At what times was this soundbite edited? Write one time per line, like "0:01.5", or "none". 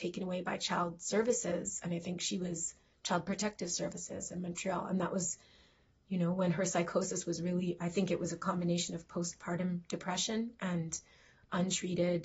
none